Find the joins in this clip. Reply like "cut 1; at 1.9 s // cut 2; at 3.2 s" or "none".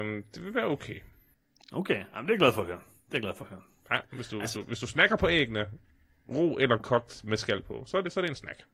none

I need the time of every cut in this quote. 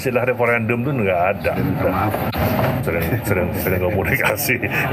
cut 1; at 2.8 s

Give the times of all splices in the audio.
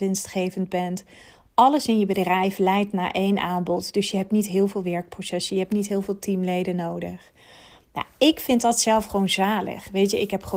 none

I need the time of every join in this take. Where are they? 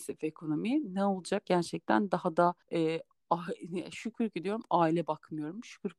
cut 1; at 1.5 s // cut 2; at 2.6 s

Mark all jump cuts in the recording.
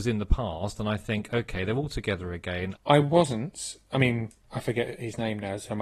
cut 1; at 2.8 s

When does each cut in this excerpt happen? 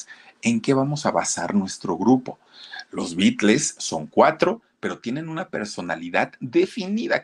none

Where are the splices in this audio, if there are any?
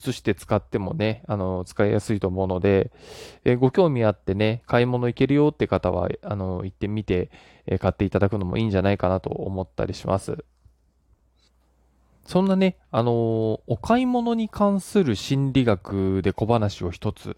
none

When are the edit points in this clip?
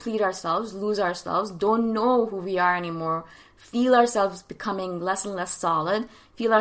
none

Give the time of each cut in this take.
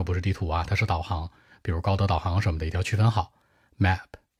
none

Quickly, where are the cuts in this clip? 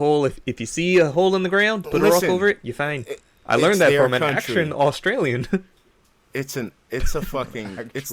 cut 1; at 1.8 s

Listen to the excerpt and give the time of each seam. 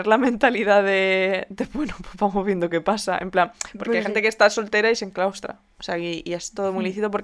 none

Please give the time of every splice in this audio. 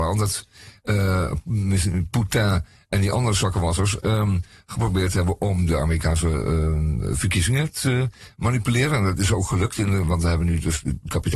none

